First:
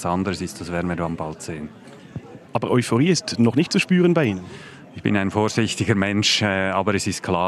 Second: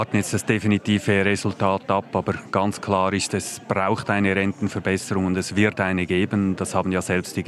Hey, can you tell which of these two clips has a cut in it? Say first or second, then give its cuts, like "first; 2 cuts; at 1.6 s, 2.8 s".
first; 1 cut; at 2.5 s